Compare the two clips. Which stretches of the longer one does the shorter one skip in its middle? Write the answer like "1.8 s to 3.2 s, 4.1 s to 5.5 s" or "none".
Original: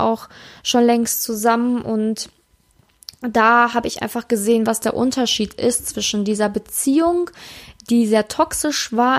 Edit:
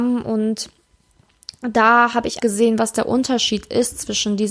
4.0 s to 4.3 s